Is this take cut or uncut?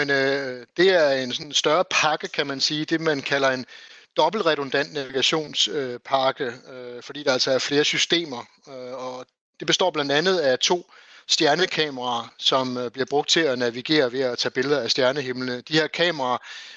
uncut